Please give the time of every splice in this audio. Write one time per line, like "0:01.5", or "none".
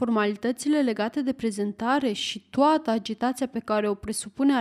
none